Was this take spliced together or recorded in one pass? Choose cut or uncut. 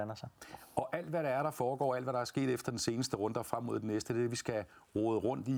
uncut